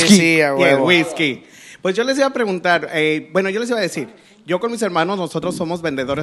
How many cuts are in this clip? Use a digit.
0